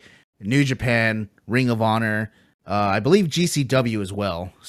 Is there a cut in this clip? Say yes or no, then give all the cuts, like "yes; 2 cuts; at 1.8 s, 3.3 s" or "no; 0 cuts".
no; 0 cuts